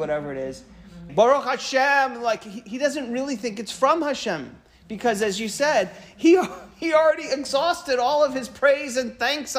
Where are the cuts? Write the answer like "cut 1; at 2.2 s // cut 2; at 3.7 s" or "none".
cut 1; at 1.1 s